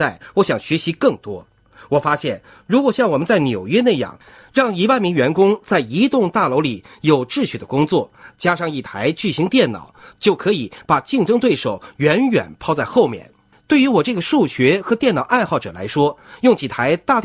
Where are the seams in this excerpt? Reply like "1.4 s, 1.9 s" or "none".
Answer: 13.5 s